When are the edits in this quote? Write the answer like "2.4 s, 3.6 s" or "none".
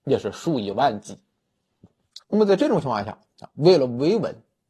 2.2 s